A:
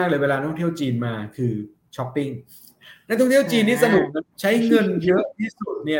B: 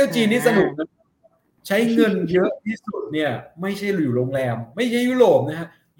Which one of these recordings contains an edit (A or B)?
A